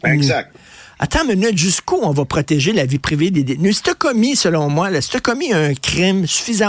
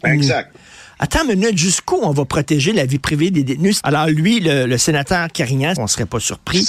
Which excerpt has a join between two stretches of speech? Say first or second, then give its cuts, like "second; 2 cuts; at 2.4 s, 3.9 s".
second; 2 cuts; at 3.8 s, 5.8 s